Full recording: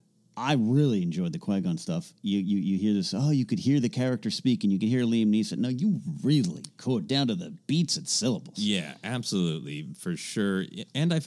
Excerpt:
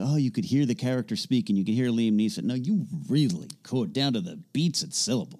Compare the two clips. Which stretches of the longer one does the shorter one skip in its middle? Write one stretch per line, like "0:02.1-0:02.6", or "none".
none

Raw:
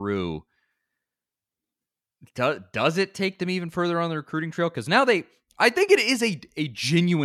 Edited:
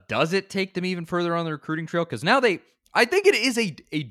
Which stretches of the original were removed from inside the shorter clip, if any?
none

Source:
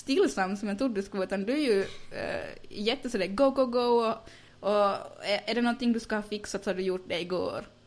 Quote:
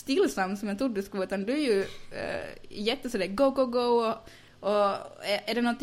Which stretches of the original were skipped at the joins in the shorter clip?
none

